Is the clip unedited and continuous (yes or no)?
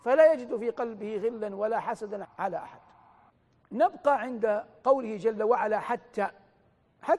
no